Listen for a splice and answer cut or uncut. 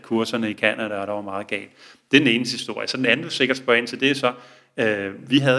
uncut